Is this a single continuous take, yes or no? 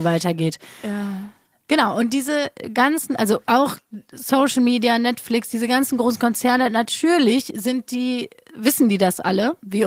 yes